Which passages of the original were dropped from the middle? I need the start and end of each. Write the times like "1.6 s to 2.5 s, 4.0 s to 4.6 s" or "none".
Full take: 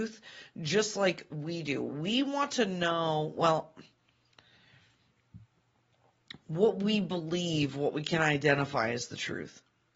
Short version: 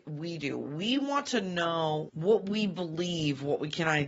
3.3 s to 6.4 s